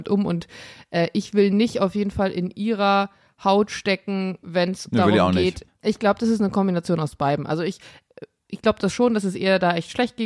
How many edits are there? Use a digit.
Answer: 1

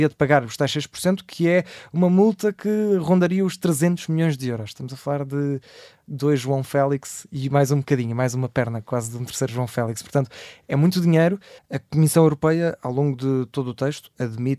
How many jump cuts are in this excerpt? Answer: 1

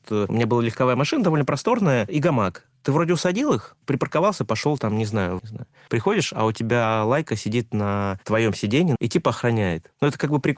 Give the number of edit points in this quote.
2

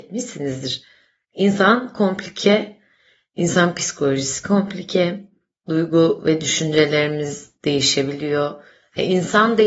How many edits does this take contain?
1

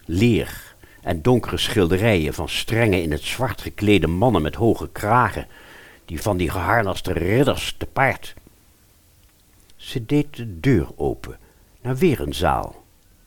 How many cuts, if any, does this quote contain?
2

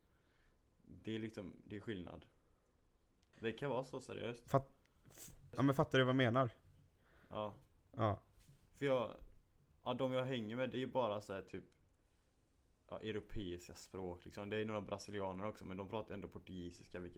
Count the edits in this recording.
1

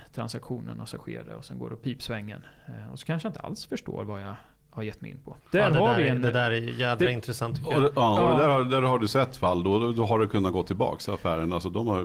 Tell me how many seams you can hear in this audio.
1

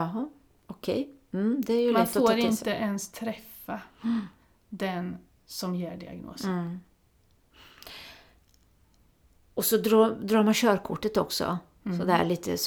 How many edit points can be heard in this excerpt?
0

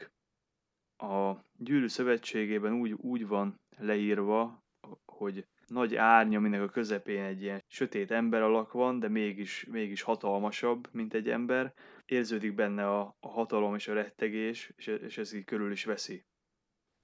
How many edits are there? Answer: 1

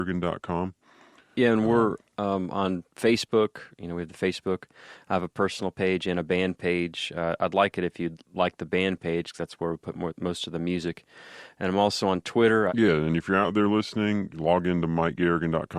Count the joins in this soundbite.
2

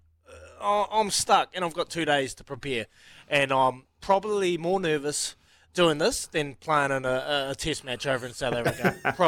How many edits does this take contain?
0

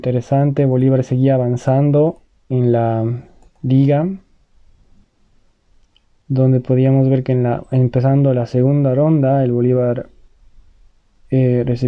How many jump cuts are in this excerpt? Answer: 0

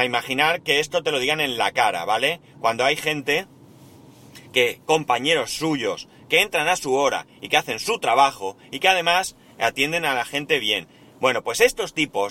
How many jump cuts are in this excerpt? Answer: 0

